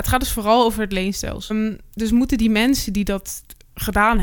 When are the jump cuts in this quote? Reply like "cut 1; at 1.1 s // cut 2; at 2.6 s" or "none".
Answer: cut 1; at 1.5 s